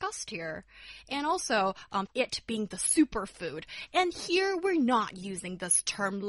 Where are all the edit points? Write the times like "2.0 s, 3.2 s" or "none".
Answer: 2.1 s